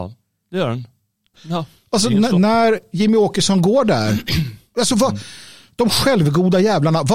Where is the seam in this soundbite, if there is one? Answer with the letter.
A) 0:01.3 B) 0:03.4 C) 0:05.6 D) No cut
A